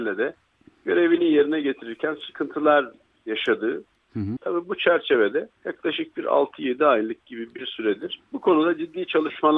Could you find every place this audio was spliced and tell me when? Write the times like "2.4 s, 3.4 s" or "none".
4.4 s, 5.6 s, 8.3 s